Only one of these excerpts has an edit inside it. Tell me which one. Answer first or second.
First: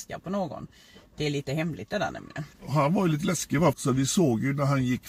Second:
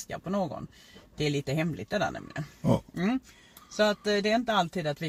first